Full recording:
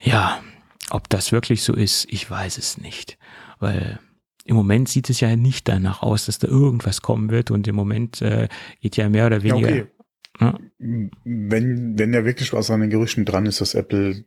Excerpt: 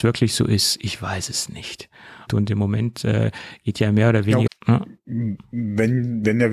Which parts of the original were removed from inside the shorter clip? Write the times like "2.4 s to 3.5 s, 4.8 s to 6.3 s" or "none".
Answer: 3.6 s to 7.4 s, 9.6 s to 10.2 s

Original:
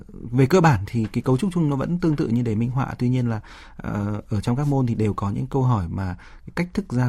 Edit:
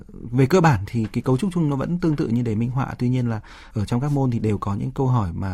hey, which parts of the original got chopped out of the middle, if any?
3.7 s to 4.3 s

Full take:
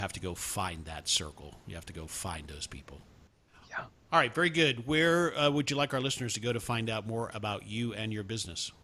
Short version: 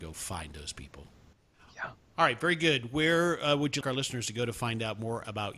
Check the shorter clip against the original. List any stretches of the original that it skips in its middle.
5.7 s to 5.9 s

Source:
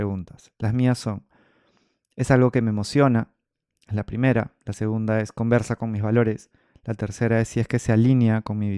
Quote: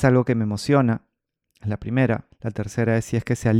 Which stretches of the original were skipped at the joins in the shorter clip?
4.6 s to 6.7 s

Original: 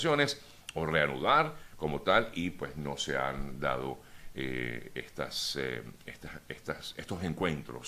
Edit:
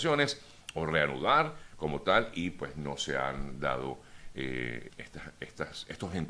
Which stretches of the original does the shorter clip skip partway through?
4.9 s to 6.0 s

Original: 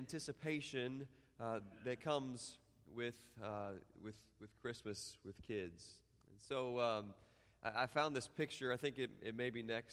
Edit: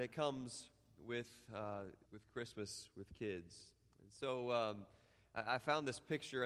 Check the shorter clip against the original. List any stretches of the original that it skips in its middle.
3.9 s to 4.3 s

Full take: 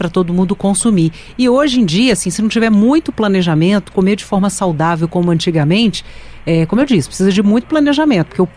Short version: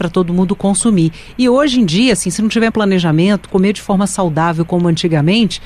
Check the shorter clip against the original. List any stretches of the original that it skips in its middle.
2.7 s to 3.1 s

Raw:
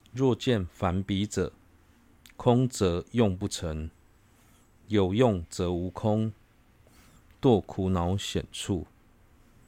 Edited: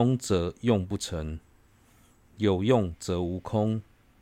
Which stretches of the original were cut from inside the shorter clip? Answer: none

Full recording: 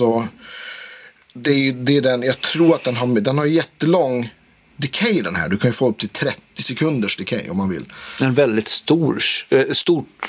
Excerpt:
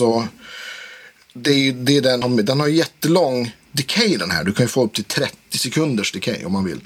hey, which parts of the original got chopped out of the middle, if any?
2.2 s to 3.0 s, 4.4 s to 4.7 s

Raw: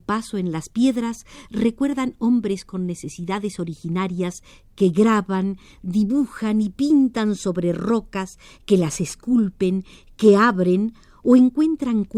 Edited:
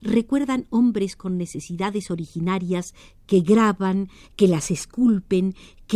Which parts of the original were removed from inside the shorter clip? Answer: 5.7 s to 8.5 s

